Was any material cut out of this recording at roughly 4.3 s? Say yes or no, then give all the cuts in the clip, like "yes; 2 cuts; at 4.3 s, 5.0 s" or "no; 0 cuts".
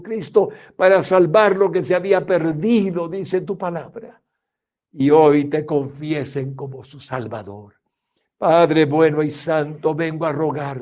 no; 0 cuts